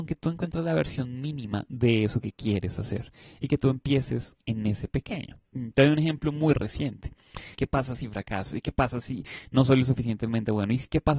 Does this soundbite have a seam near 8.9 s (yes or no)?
no